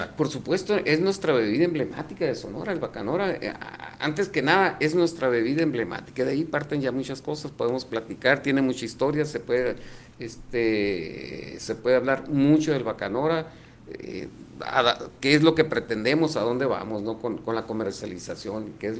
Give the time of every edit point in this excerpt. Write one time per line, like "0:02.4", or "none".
none